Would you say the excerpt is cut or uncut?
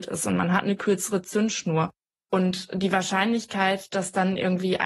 uncut